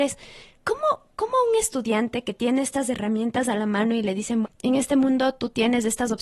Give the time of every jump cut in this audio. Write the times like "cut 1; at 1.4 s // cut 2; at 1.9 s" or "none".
cut 1; at 4.4 s